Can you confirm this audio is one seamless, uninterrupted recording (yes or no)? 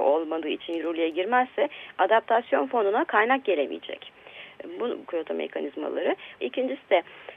no